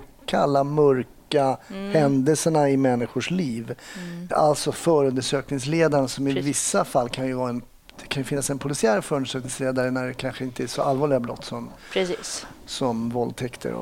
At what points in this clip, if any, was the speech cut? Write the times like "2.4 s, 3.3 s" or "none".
4.3 s